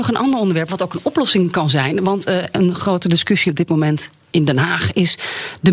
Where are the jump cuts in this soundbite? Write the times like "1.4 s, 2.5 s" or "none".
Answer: none

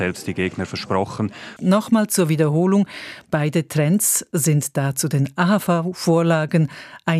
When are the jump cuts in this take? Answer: 1.6 s

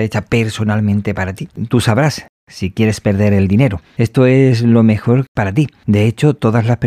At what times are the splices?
none

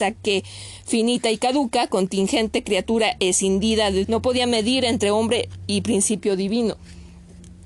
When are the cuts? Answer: 4.0 s

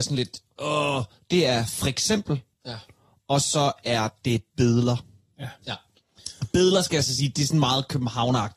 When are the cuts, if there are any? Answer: none

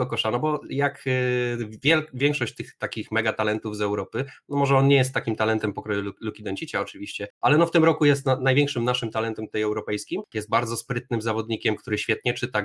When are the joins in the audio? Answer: 10.3 s

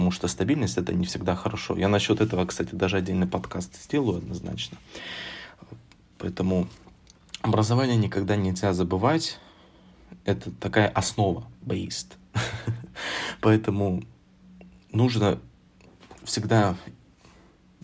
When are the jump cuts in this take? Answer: 11.6 s

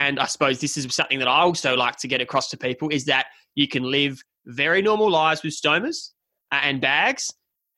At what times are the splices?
none

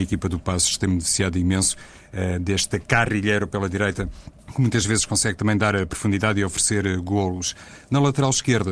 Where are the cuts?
4.4 s

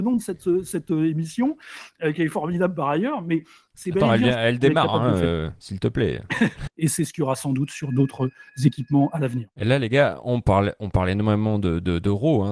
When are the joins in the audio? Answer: 6.7 s

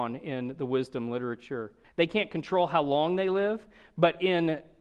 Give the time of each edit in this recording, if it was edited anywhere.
1.8 s

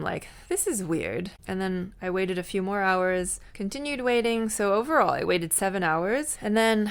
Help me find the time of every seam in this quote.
none

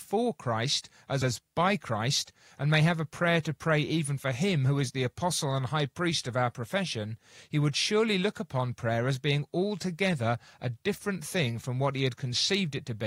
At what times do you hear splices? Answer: 1.2 s

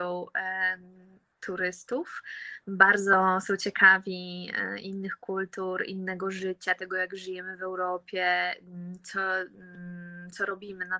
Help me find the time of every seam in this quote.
none

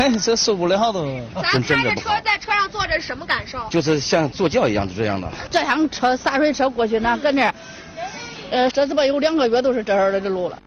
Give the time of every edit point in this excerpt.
5.5 s, 8.7 s

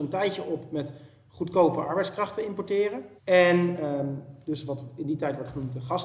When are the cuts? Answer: 3.2 s

